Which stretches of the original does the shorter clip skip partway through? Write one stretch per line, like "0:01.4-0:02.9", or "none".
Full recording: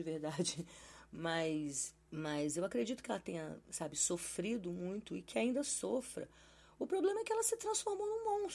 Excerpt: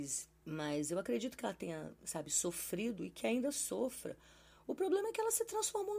0:04.6-0:05.1